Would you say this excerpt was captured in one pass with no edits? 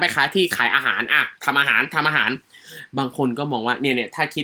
no; 1 cut; at 1.4 s

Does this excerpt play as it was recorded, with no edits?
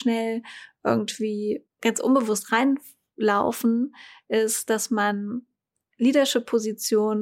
yes; 0 cuts

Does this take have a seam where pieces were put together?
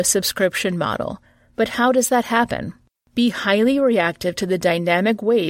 yes; 1 cut; at 3.0 s

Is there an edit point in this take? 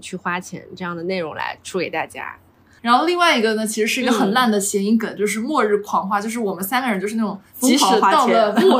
yes; 1 cut; at 2.8 s

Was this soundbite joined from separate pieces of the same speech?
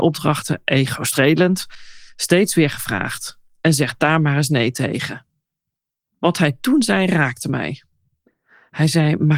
no; 0 cuts

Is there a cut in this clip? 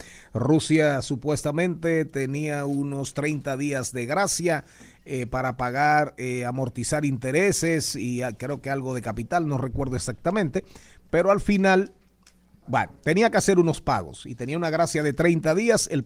no; 0 cuts

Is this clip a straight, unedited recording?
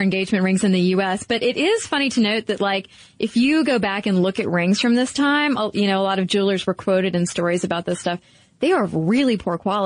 yes; 0 cuts

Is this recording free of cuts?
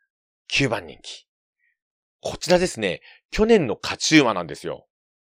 yes; 0 cuts

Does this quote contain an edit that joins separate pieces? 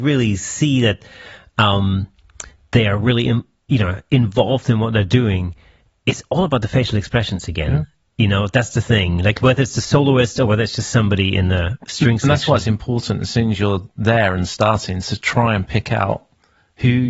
no; 0 cuts

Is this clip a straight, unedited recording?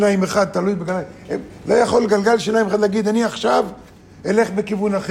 yes; 0 cuts

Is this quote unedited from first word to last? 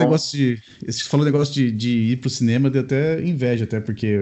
yes; 0 cuts

